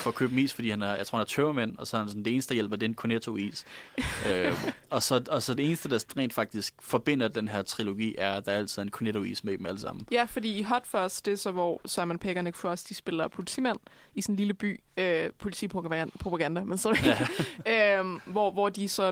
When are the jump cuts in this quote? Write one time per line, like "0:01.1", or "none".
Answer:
0:05.6
0:14.9

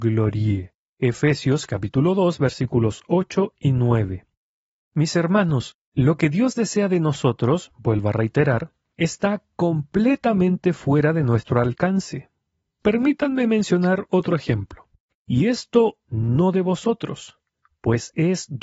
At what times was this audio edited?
0:15.1

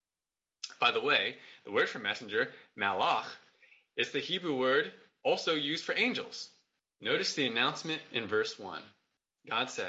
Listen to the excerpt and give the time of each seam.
0:07.0

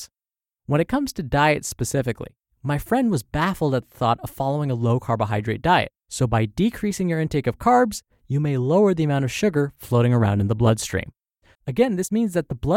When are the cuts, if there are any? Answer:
0:06.0
0:11.5

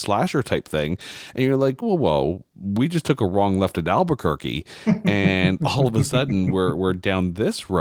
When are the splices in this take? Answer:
0:01.8

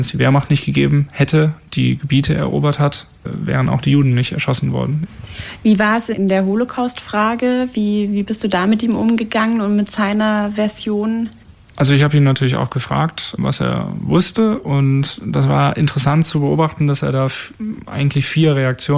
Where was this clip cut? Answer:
0:01.7

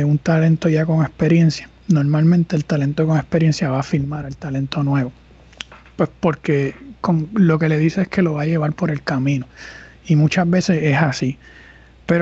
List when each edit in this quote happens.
none

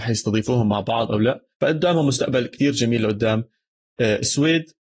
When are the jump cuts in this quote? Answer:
0:01.5

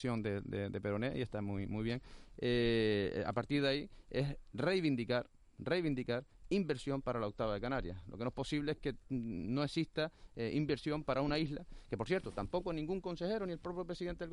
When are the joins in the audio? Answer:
none

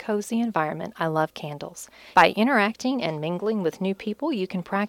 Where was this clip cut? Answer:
0:02.1

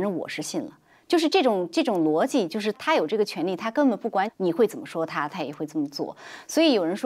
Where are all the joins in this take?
0:02.7
0:04.3
0:05.3

